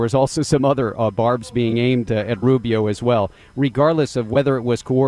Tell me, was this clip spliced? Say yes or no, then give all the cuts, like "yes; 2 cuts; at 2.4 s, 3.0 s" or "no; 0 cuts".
yes; 1 cut; at 2.1 s